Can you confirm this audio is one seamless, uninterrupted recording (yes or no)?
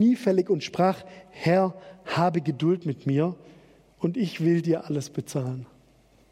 yes